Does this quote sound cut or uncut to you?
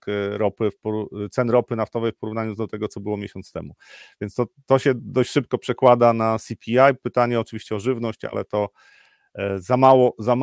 uncut